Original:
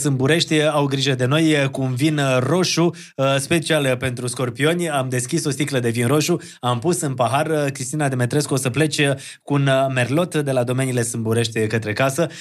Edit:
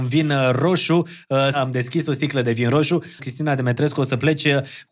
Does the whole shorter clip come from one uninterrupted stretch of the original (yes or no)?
no